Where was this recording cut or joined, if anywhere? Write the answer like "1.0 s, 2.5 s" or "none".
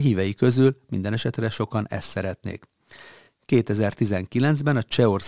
none